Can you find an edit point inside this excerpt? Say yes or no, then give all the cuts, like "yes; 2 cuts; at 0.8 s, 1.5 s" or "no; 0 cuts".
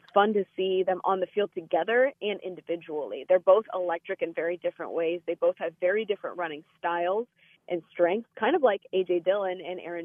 no; 0 cuts